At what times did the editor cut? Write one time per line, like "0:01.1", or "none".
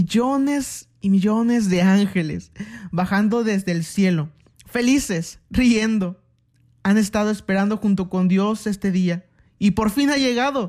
none

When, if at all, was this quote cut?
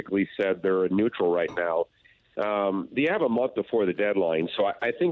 none

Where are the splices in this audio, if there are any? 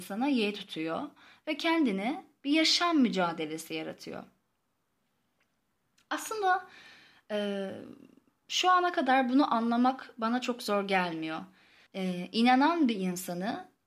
0:11.9

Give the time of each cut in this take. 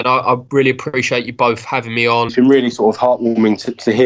0:02.3

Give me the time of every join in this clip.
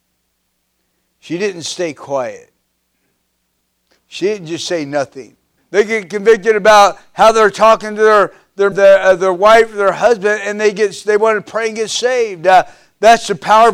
0:05.6
0:08.7

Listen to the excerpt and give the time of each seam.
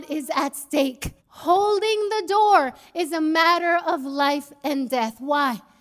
0:01.2

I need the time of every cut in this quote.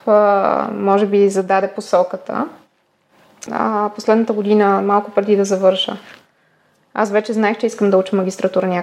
0:03.5

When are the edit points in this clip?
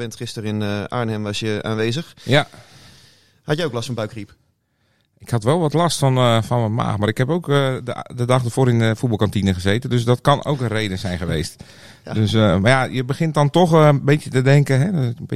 none

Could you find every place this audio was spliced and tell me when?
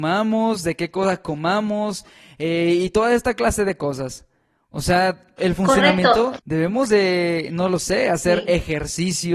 0:05.4
0:06.4

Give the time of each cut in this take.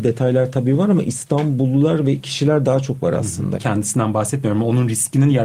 0:03.5

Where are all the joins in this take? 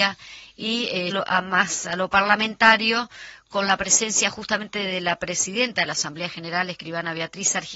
0:01.1

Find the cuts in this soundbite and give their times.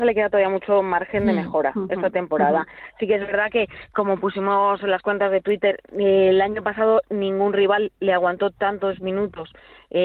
none

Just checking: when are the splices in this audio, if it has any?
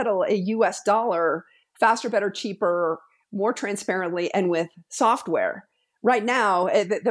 none

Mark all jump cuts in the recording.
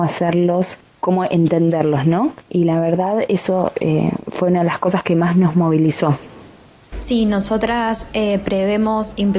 0:06.9

